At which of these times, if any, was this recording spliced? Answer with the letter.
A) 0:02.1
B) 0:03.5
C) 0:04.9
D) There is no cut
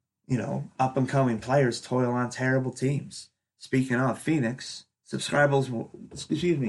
C